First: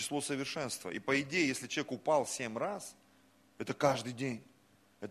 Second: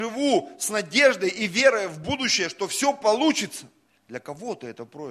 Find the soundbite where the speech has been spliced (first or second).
second